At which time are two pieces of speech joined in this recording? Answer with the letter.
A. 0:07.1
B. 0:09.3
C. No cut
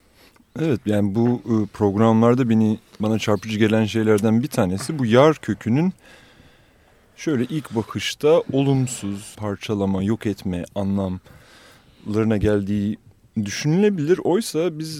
B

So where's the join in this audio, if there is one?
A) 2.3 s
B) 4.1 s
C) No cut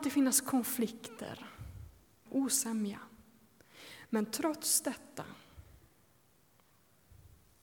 A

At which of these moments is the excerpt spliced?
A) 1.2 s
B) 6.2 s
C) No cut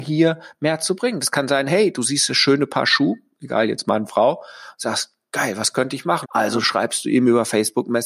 B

